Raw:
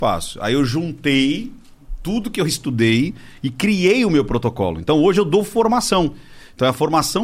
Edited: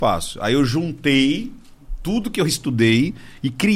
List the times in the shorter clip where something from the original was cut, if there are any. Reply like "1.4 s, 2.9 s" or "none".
none